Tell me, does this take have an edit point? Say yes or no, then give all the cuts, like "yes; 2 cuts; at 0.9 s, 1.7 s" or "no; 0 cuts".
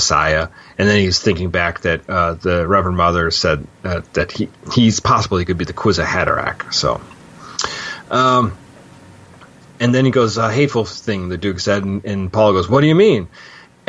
no; 0 cuts